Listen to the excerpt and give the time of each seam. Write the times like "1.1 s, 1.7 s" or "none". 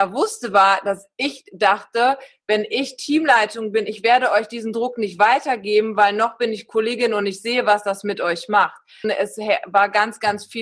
9.0 s